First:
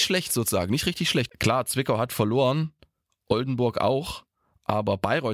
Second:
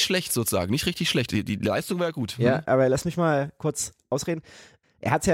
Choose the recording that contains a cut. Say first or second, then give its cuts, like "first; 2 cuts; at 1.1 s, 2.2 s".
first; 1 cut; at 1.3 s